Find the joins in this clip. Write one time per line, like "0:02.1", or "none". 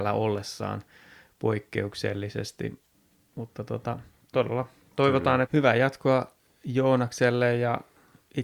0:05.4